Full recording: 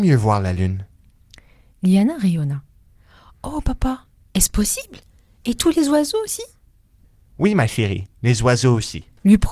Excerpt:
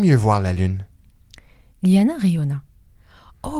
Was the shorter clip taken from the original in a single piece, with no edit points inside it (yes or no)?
yes